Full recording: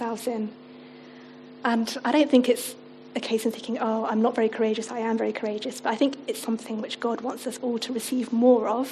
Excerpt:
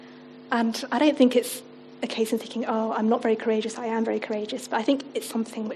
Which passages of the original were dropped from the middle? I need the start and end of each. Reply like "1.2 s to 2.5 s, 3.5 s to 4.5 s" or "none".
none